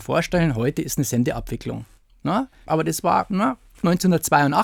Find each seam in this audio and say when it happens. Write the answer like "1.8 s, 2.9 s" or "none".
2.7 s